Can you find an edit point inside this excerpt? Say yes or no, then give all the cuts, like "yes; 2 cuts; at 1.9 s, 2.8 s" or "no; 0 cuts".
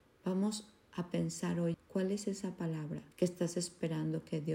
yes; 2 cuts; at 1.7 s, 3.1 s